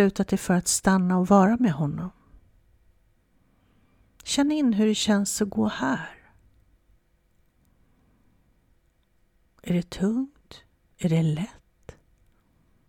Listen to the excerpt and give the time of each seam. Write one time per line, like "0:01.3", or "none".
none